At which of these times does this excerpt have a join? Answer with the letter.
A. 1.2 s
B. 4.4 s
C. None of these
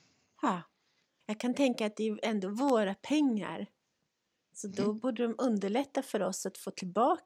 A